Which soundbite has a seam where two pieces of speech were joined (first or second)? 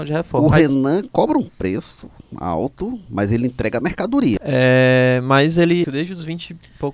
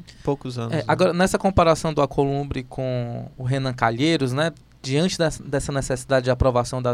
first